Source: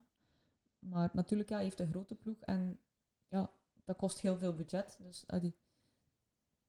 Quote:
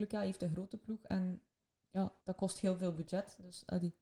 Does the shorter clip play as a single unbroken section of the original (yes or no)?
no